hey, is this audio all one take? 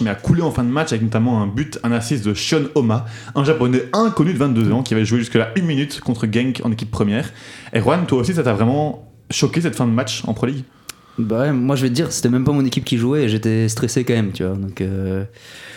yes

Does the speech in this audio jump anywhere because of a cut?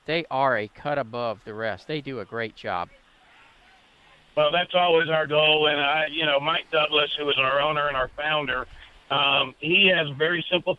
no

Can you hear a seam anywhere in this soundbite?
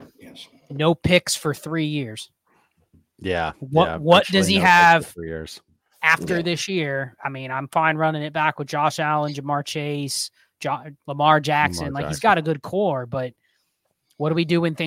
no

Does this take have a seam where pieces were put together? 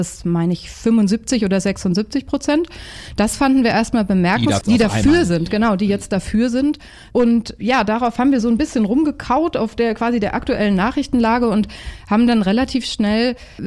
yes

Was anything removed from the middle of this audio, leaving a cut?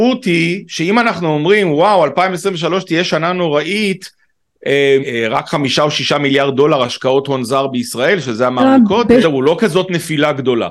yes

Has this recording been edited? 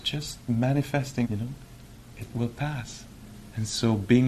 yes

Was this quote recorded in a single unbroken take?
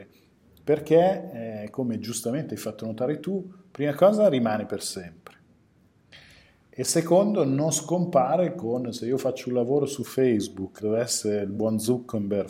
no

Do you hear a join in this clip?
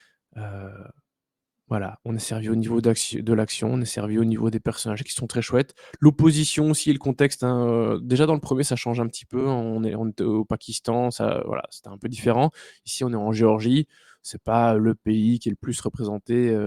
no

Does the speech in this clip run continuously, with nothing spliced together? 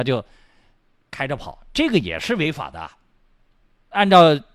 yes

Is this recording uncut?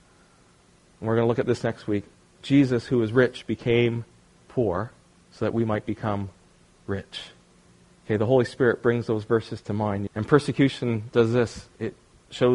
no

